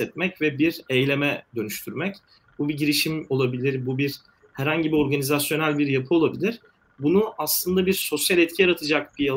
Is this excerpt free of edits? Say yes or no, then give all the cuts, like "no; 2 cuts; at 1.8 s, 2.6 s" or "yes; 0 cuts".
no; 1 cut; at 3.8 s